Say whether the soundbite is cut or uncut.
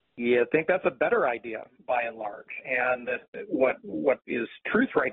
uncut